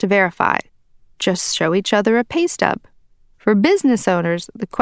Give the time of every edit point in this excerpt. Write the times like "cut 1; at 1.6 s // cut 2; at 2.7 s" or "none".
none